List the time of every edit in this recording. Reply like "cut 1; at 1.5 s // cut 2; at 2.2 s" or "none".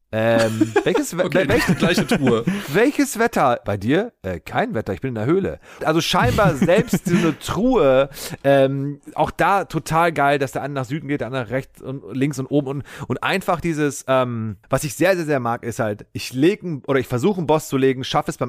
cut 1; at 3.6 s // cut 2; at 5.8 s

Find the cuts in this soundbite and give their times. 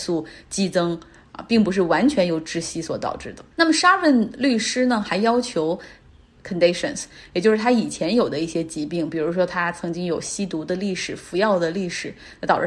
cut 1; at 3.5 s // cut 2; at 6.4 s

